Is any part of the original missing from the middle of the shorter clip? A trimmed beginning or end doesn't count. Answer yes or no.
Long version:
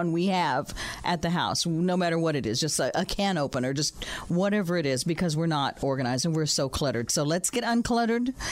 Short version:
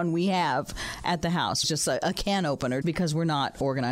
yes